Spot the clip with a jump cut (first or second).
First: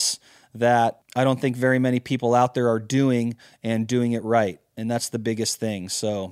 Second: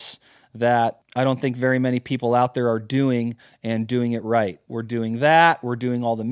second